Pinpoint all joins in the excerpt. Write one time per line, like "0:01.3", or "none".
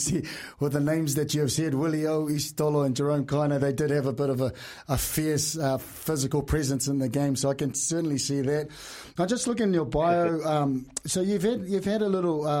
none